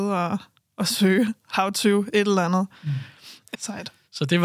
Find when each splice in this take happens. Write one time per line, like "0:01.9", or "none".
0:03.5